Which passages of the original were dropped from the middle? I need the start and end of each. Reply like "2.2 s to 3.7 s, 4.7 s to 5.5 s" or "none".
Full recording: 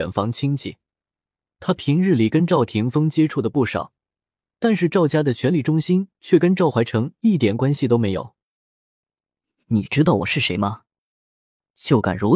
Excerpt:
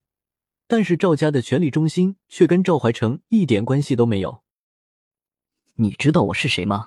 none